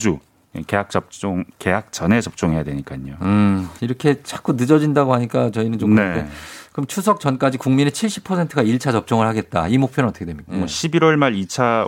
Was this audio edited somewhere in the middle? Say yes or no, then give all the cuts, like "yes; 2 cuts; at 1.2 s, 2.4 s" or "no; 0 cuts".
yes; 2 cuts; at 3.8 s, 10.5 s